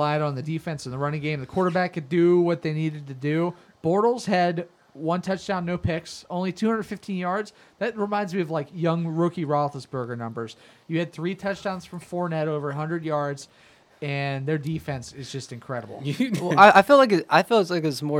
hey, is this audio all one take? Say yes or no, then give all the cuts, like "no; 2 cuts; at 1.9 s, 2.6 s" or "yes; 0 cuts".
yes; 0 cuts